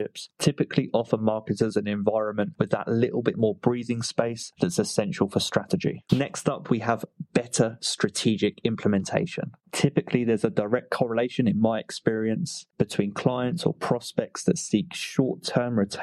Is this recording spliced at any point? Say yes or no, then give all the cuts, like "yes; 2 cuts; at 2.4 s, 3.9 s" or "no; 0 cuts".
yes; 1 cut; at 6.1 s